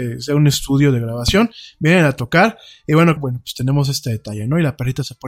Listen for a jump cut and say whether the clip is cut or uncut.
cut